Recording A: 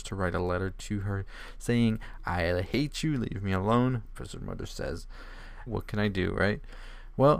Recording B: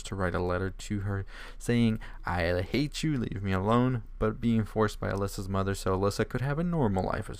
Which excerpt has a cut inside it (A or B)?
A